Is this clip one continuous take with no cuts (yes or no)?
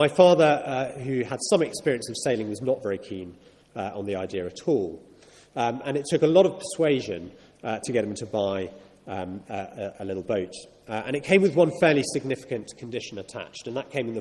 yes